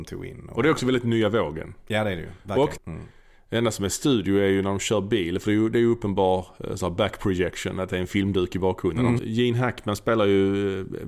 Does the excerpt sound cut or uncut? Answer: cut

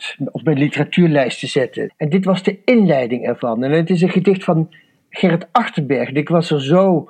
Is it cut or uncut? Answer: cut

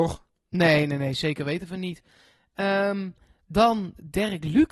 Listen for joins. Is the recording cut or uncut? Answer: uncut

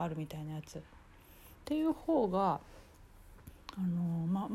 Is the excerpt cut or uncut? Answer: cut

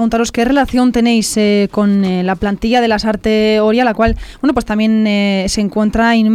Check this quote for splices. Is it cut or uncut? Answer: uncut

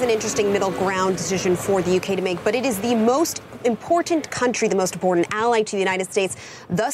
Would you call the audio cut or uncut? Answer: uncut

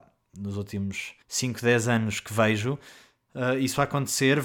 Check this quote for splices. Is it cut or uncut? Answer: cut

